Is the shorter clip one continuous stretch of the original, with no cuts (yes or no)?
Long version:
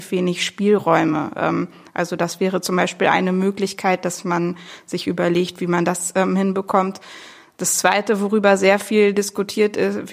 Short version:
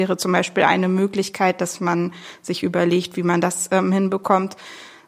yes